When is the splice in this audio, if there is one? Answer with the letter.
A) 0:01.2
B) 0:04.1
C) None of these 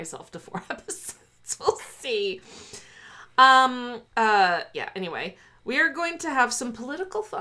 B